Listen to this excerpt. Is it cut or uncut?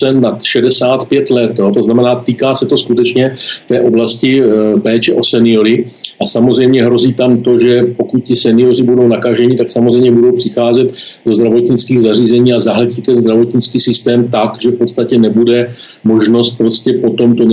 uncut